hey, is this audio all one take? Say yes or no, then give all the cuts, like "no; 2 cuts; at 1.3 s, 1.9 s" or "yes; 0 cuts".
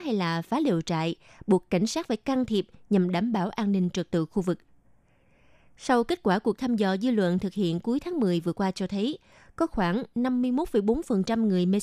yes; 0 cuts